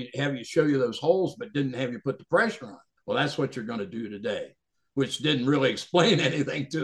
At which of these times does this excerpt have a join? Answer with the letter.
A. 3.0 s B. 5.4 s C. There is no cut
A